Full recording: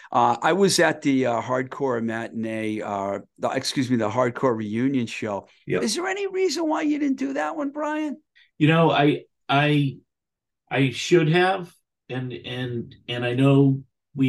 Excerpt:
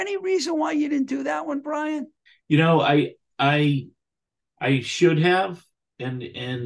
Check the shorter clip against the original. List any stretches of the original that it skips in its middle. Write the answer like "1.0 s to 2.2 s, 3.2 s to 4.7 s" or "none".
none